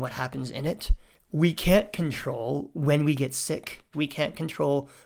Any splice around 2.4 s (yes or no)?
no